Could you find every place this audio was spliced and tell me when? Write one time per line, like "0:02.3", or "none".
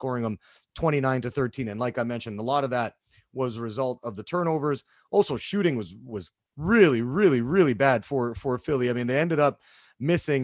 none